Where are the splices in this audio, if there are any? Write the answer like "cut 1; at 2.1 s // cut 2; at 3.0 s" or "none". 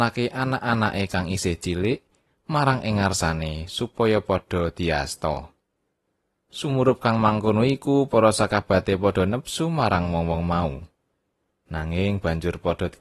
none